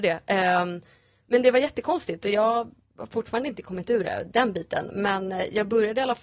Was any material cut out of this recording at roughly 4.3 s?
yes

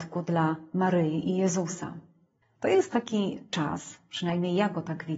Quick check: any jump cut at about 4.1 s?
no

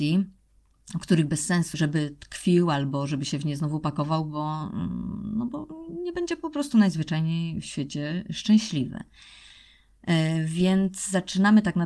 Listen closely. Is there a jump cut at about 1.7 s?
yes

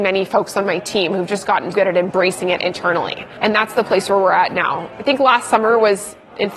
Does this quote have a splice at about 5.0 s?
no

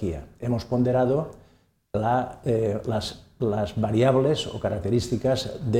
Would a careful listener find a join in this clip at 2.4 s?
yes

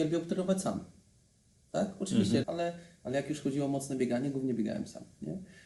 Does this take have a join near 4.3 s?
no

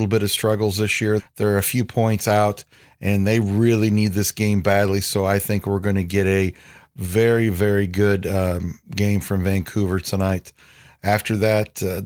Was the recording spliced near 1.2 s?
yes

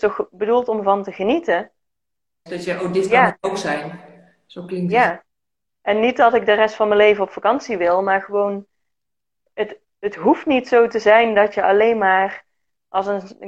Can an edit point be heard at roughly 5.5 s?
no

